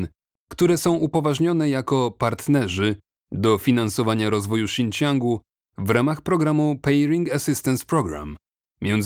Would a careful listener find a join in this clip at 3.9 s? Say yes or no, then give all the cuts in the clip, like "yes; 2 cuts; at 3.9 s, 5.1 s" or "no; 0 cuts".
no; 0 cuts